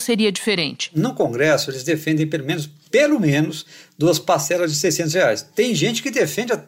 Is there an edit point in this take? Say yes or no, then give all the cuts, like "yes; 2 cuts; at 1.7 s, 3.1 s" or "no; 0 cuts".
no; 0 cuts